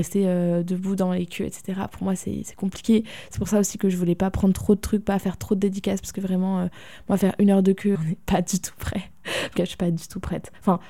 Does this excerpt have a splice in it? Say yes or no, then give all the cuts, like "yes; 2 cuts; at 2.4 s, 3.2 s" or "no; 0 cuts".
yes; 2 cuts; at 7.9 s, 9.6 s